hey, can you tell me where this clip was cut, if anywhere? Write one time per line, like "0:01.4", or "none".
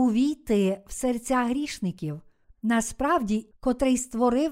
0:02.4
0:03.5